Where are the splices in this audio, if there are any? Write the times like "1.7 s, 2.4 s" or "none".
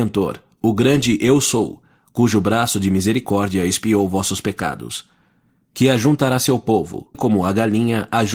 7.1 s